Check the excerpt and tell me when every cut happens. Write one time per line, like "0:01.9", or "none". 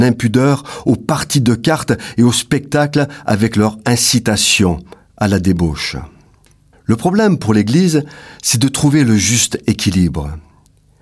0:06.7